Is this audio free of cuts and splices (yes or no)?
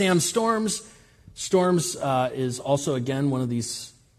yes